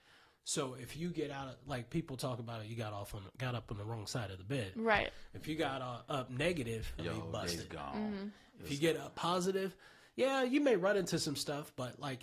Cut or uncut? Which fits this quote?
cut